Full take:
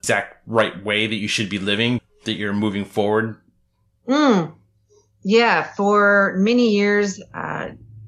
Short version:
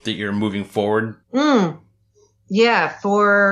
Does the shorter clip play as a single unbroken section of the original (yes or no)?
no